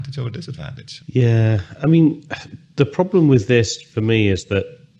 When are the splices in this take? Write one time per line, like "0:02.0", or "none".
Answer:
0:01.0